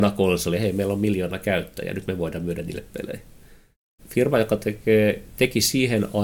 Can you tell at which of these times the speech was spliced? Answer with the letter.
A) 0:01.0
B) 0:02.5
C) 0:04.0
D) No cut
C